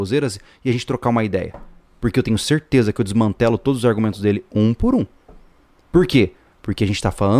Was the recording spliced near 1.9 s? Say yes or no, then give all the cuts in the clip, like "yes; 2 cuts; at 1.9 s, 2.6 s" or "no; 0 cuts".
no; 0 cuts